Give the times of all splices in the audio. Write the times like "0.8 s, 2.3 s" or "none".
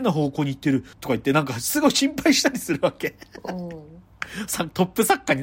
0.9 s